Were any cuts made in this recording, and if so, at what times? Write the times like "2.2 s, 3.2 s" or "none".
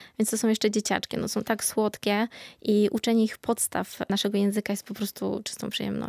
none

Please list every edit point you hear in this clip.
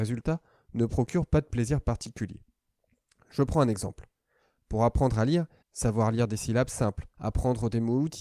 5.6 s, 7.1 s

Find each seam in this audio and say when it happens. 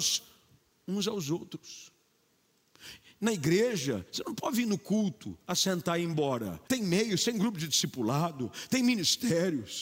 6.7 s

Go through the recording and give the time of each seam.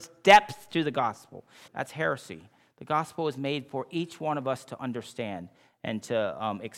1.7 s

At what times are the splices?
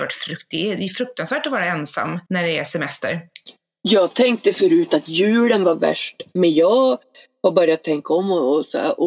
2.3 s

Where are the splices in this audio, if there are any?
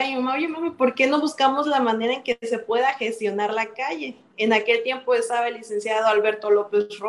4.3 s

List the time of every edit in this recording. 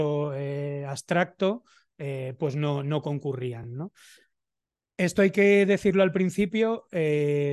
none

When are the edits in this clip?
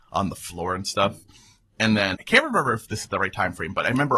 2.1 s

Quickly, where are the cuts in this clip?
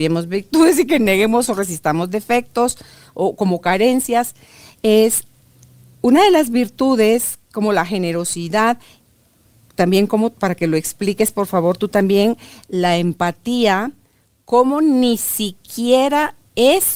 none

